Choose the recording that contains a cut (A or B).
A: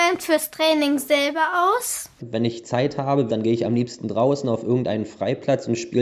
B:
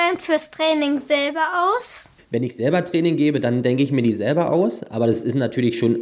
A